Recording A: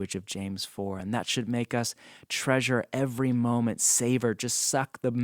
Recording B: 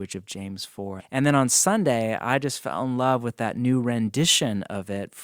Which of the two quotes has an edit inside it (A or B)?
B